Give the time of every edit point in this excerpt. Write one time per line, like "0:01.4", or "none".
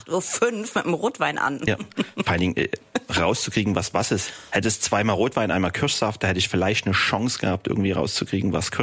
none